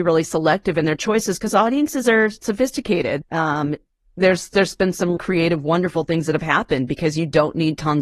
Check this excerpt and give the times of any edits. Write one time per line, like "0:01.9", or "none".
0:03.2
0:05.2